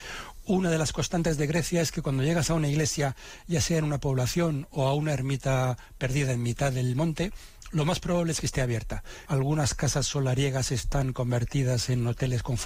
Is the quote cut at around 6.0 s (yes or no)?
no